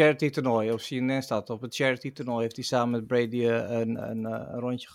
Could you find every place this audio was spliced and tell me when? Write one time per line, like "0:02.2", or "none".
none